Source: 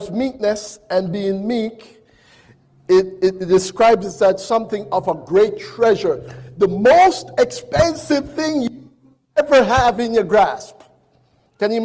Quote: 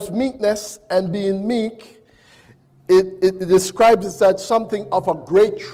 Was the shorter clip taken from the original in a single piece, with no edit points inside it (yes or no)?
yes